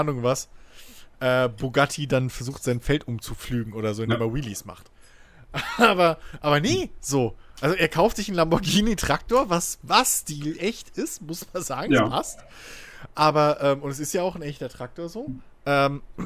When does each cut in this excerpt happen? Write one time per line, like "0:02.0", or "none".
none